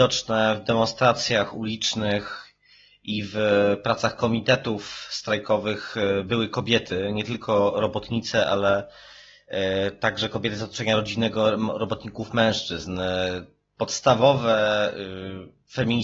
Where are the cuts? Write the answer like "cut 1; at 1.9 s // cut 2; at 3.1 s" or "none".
none